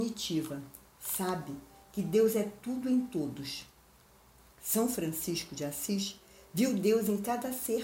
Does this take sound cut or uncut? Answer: uncut